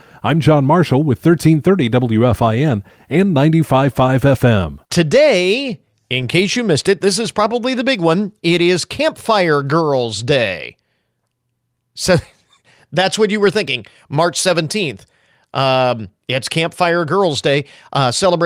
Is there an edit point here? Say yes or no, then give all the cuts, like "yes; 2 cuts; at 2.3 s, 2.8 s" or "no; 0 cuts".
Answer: no; 0 cuts